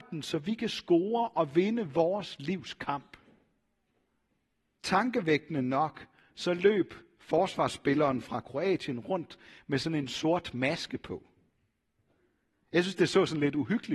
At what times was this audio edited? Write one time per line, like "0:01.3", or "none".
0:04.7